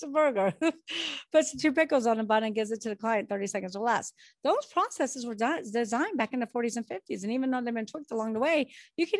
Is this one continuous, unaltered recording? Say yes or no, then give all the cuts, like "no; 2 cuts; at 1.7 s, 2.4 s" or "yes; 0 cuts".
yes; 0 cuts